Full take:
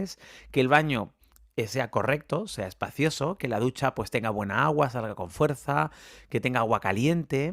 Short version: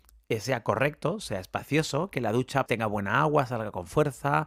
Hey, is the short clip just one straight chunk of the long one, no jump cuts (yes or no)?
no